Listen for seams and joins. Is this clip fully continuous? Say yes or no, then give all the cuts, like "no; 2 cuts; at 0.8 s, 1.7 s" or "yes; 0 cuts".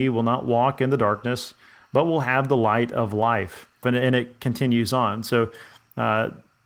no; 1 cut; at 3.8 s